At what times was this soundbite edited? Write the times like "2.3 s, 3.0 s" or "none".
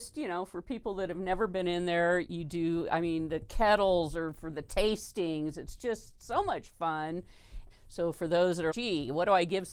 7.7 s, 8.7 s